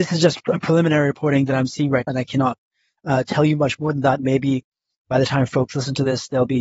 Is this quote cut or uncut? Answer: cut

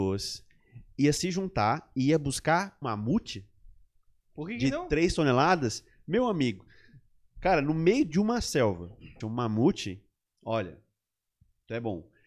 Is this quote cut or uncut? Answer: cut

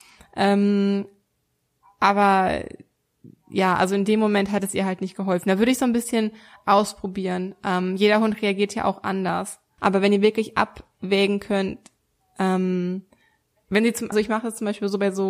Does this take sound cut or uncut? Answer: cut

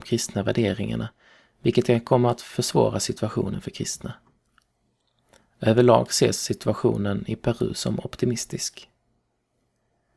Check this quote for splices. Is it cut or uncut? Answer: uncut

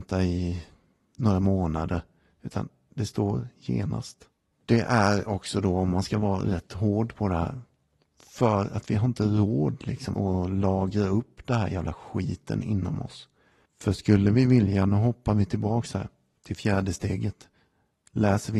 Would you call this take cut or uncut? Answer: cut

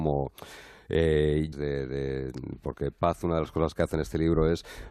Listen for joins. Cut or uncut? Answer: cut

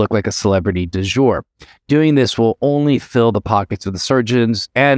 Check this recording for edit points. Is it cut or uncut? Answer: uncut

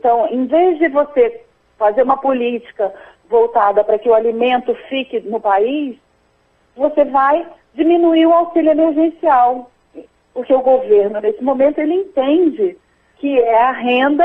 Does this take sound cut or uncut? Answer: uncut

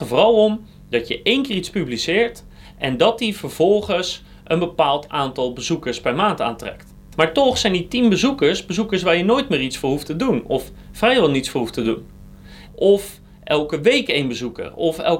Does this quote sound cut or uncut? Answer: cut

